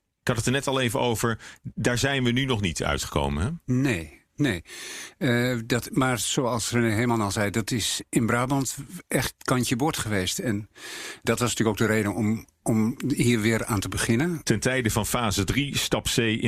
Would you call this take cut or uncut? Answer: cut